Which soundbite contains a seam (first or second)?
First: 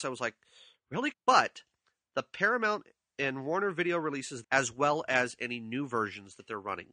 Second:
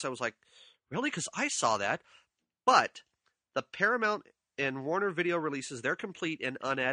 first